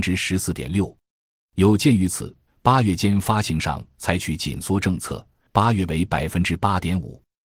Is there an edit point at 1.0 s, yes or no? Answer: no